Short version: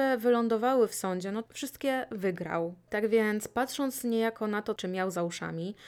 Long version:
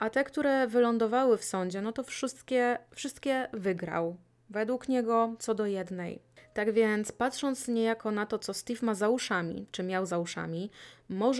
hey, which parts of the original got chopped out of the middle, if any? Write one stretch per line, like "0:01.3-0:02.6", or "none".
0:02.0-0:02.9
0:04.3-0:06.5
0:08.4-0:09.7